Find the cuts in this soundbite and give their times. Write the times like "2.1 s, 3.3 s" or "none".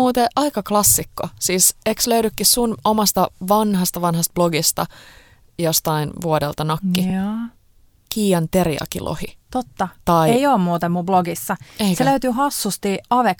none